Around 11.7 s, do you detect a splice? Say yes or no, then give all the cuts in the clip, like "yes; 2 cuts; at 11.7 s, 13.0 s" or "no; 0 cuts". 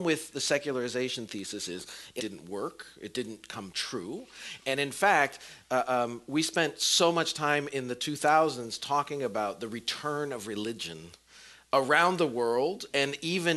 no; 1 cut; at 2.2 s